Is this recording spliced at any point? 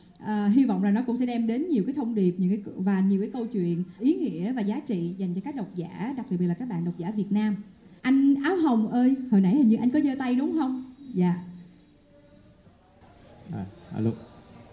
yes; 2 cuts; at 4.0 s, 8.0 s

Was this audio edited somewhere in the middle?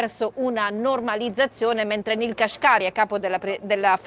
no; 0 cuts

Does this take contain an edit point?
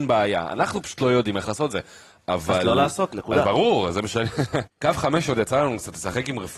yes; 1 cut; at 4.7 s

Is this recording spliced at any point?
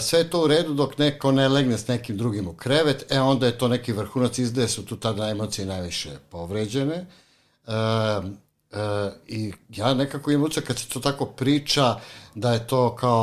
no; 0 cuts

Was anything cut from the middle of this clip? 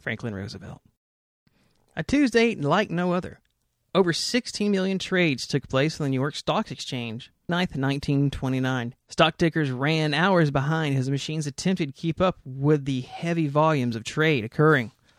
yes; 2 cuts; at 7.5 s, 9.0 s

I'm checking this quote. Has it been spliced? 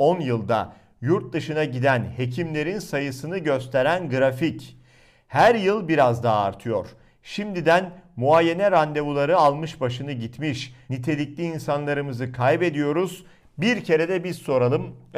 yes; 2 cuts; at 10.9 s, 13.4 s

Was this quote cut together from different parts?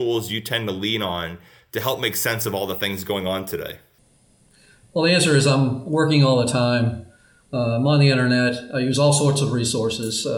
no; 0 cuts

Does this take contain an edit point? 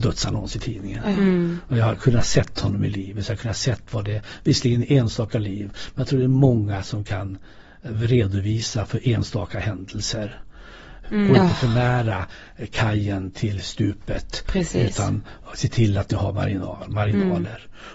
yes; 1 cut; at 11.0 s

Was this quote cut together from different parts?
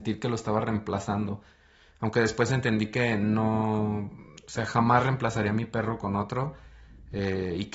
no; 0 cuts

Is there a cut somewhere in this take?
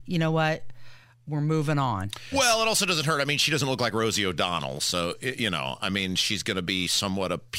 yes; 1 cut; at 2.3 s

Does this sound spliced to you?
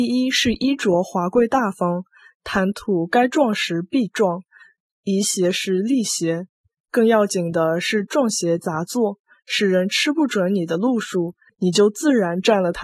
yes; 1 cut; at 11.5 s

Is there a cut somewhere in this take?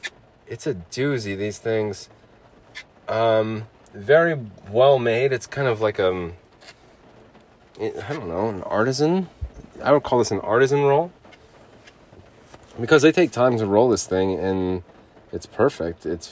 no; 0 cuts

